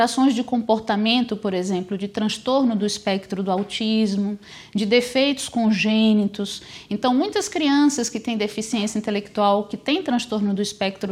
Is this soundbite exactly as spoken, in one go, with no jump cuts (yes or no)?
yes